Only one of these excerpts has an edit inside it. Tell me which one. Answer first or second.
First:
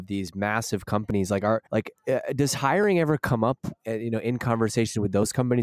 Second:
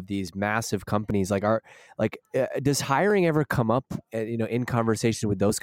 first